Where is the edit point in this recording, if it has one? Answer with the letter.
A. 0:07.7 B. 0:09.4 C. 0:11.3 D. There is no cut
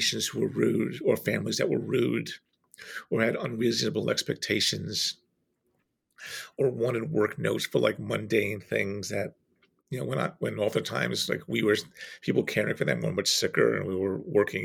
D